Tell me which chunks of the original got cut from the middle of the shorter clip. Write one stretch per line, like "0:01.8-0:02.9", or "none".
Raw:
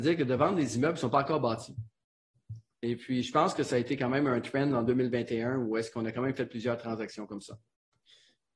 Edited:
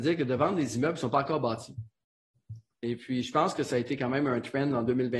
none